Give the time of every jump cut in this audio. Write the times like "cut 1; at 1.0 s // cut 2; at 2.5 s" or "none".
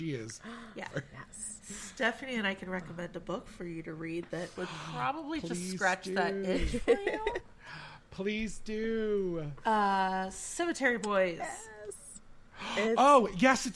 cut 1; at 0.9 s